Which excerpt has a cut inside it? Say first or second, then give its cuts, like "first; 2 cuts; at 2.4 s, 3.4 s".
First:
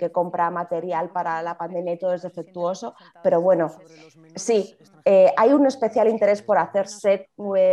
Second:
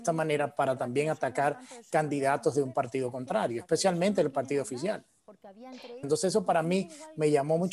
second; 1 cut; at 6.0 s